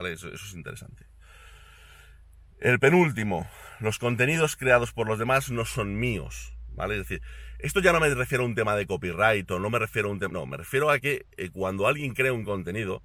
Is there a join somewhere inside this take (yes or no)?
no